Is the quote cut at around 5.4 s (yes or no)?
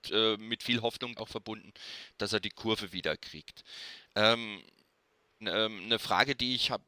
yes